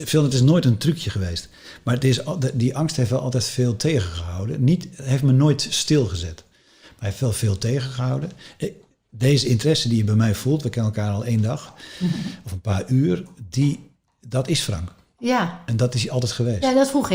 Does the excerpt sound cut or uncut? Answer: uncut